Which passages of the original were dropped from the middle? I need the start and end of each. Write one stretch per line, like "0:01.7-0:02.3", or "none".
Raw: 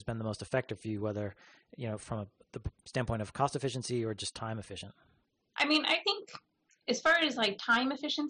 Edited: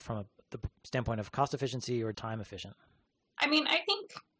0:04.2-0:04.3